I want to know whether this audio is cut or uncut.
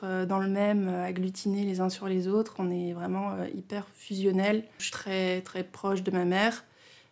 uncut